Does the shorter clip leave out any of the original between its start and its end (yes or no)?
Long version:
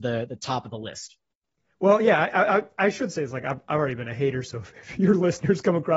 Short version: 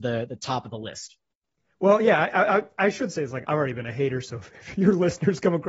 yes